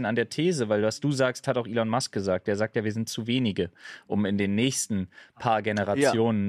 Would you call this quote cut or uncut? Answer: uncut